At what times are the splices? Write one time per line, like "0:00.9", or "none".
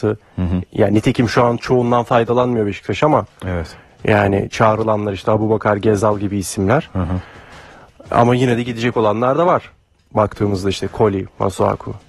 none